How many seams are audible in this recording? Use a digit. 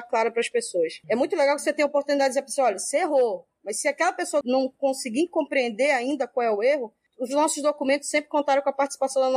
2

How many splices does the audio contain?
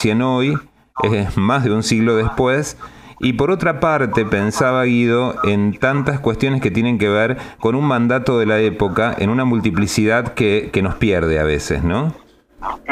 0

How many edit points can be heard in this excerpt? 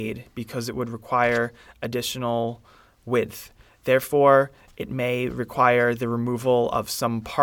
0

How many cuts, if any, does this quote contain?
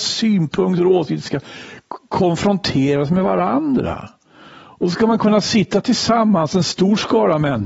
0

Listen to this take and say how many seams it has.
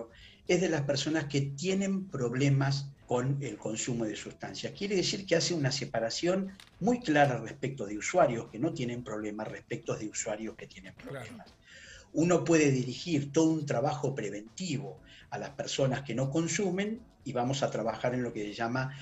1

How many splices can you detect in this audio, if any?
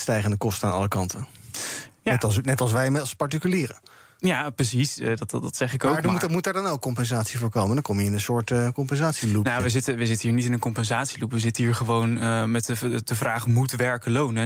0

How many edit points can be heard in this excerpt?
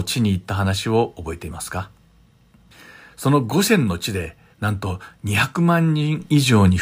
1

